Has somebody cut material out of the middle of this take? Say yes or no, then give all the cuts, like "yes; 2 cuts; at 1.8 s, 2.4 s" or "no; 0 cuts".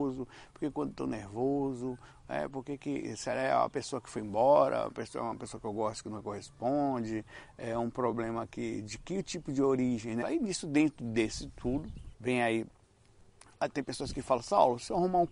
yes; 2 cuts; at 10.2 s, 12.1 s